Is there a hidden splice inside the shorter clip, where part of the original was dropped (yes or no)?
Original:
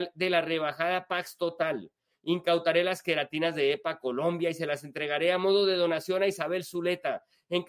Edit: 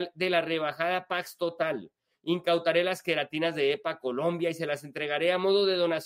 no